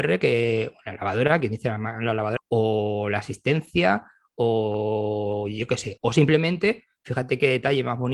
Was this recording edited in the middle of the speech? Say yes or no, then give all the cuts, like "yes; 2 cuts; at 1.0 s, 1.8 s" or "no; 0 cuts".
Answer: yes; 1 cut; at 2.4 s